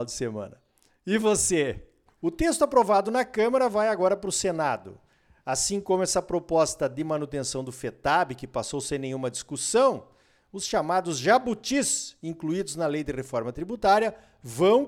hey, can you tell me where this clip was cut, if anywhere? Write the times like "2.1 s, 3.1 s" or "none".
2.1 s